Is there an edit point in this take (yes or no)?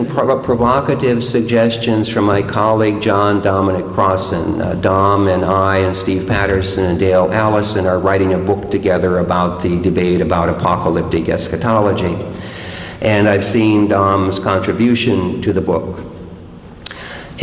no